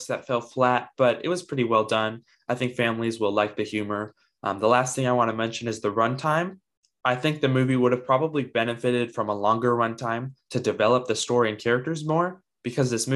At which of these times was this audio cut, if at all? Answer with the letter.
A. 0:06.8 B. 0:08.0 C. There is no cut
C